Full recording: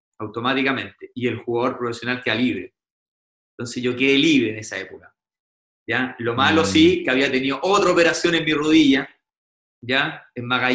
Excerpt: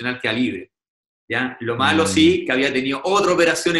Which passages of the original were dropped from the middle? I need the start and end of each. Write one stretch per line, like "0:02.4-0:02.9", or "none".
0:03.2-0:05.7